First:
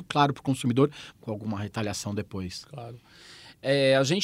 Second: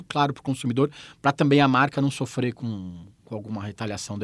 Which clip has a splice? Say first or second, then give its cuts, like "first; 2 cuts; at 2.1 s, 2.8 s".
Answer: first; 1 cut; at 1.1 s